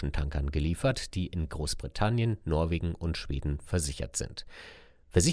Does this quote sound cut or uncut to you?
uncut